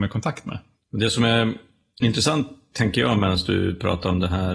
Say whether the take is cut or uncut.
uncut